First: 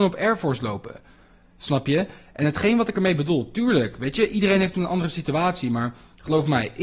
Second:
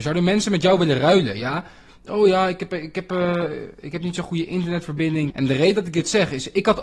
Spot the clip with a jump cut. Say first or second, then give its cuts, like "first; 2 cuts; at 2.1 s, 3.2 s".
second; 1 cut; at 5.3 s